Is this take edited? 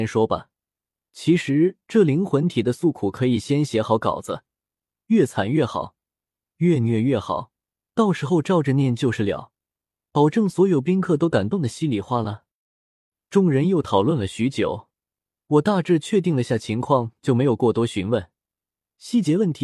no; 0 cuts

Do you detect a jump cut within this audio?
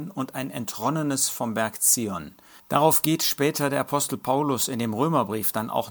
yes; 1 cut; at 2.6 s

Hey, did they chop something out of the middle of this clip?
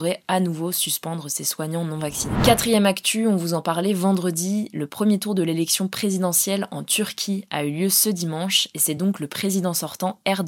no; 0 cuts

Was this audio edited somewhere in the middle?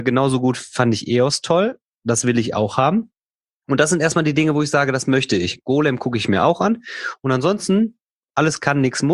no; 0 cuts

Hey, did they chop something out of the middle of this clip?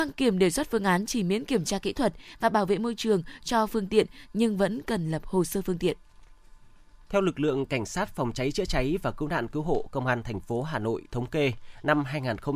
no; 0 cuts

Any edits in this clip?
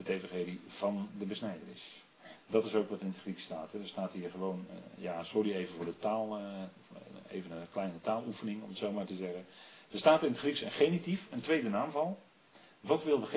no; 0 cuts

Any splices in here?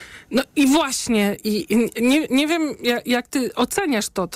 no; 0 cuts

